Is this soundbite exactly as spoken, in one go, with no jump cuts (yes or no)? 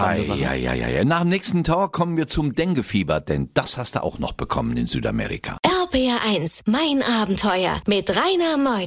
yes